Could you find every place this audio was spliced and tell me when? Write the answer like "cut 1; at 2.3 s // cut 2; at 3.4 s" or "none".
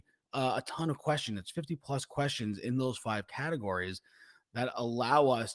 none